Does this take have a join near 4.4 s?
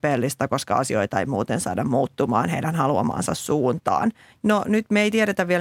yes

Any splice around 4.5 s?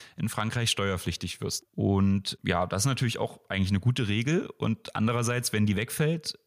no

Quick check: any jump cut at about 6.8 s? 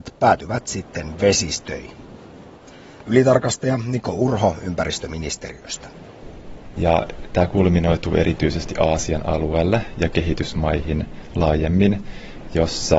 yes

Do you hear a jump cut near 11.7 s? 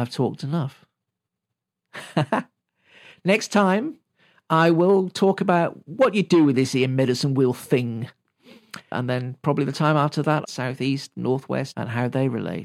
yes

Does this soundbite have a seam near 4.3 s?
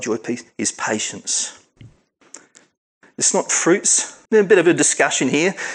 yes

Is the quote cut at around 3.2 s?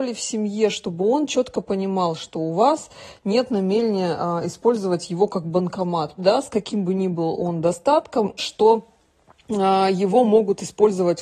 no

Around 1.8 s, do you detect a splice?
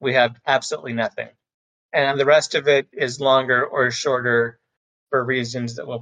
no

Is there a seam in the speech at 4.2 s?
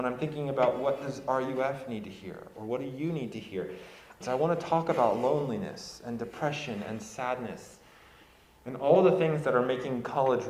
yes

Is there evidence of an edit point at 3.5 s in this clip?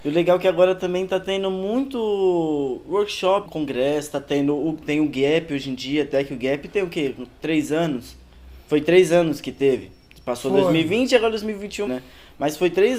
yes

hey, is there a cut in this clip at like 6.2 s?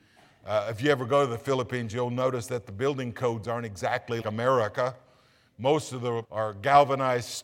yes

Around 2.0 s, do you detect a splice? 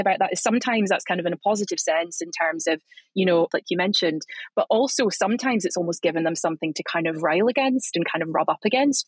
no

